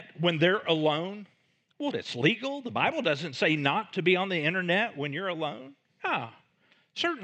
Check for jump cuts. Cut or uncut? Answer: cut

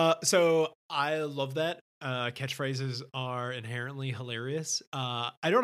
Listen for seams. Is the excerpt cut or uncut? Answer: uncut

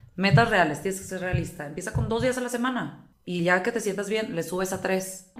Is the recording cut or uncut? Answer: uncut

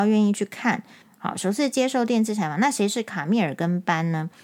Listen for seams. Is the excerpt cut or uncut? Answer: cut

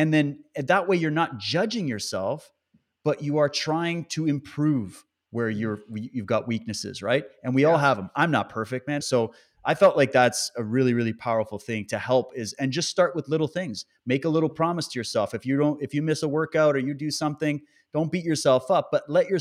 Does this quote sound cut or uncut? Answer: cut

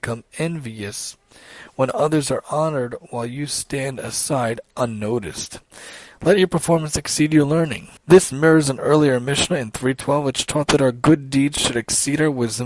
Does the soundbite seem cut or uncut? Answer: cut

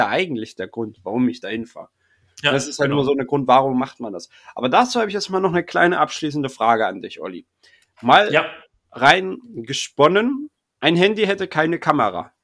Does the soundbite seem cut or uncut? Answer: uncut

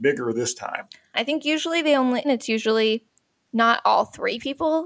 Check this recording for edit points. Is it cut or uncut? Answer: cut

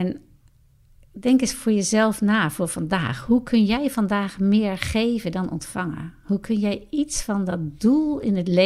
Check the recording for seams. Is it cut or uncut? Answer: uncut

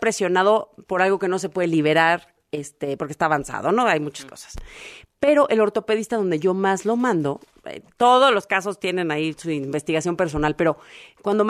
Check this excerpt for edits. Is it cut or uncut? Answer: uncut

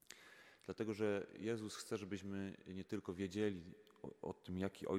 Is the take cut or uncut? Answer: uncut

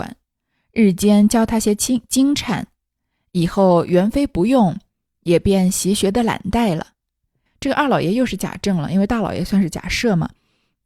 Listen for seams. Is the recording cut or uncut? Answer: cut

